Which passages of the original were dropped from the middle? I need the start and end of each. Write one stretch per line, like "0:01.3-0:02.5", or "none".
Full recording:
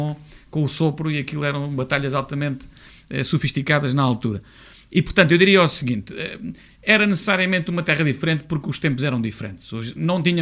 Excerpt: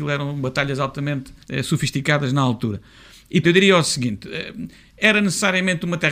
0:02.8-0:03.0
0:05.0-0:05.3